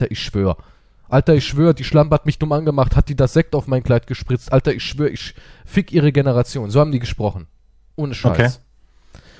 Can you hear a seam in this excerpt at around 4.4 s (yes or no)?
no